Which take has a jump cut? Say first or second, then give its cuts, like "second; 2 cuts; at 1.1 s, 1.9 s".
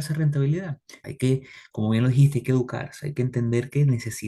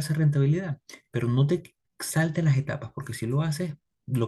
first; 1 cut; at 1.0 s